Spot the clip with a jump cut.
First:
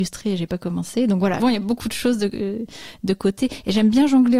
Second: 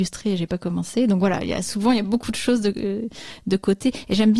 first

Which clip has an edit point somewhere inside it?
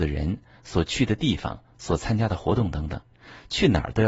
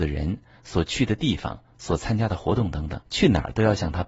second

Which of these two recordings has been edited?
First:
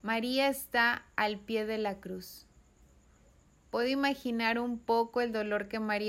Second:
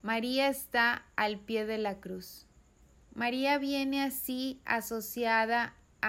second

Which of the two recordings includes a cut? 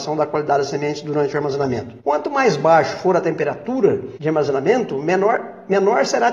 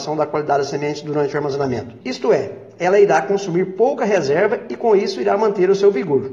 second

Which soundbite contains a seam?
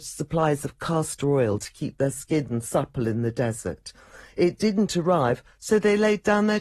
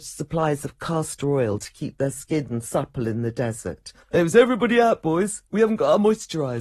second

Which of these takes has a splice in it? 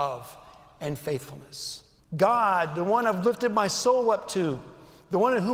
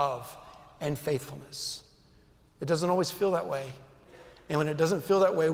first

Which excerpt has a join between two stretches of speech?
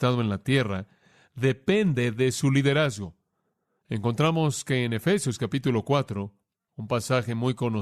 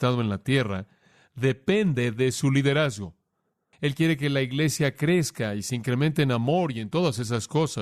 second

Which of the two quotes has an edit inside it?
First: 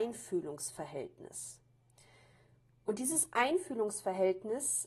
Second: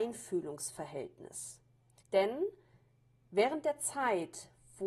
second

